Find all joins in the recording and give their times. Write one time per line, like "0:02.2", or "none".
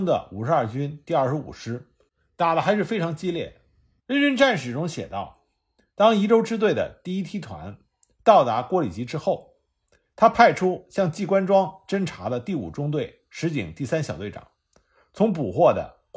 0:04.0